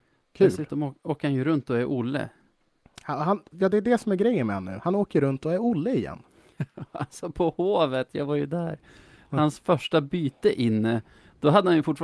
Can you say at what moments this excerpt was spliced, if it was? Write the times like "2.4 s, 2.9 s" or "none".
none